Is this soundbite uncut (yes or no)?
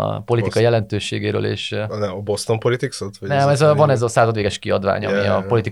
yes